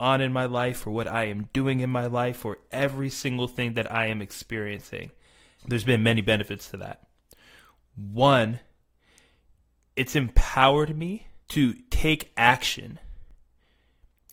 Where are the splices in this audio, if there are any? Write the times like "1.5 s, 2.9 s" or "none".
5.6 s, 11.4 s